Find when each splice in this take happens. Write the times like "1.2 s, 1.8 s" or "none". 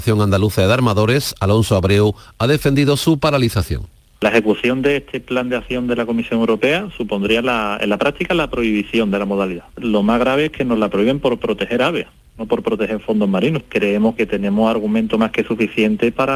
14.2 s